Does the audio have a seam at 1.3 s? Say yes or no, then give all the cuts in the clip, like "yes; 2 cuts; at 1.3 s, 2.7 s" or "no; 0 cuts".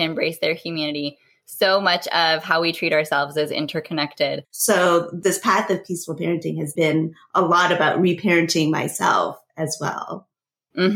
no; 2 cuts; at 4.4 s, 6.8 s